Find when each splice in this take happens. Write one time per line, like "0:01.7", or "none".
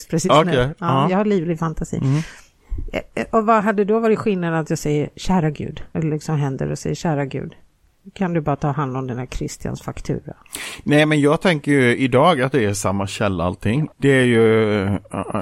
0:05.9
0:13.9